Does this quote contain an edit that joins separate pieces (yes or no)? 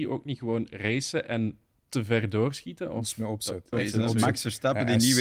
yes